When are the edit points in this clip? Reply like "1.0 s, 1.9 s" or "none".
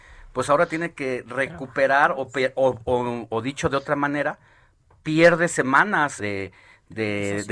6.2 s